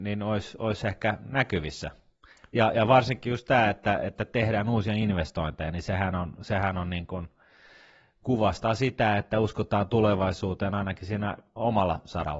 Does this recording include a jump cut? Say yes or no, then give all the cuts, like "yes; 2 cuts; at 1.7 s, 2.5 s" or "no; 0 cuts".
no; 0 cuts